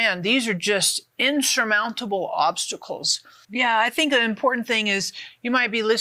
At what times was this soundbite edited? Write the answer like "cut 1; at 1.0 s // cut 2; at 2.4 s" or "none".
cut 1; at 3.4 s